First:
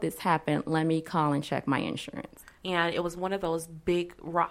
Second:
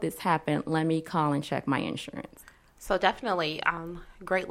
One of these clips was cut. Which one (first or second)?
first